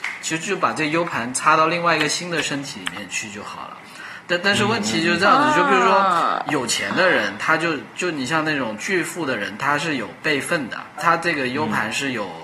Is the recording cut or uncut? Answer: cut